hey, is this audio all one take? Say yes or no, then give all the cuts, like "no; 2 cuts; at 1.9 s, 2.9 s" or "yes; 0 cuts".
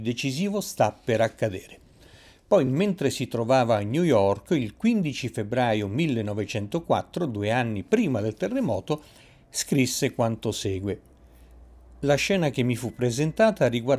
yes; 0 cuts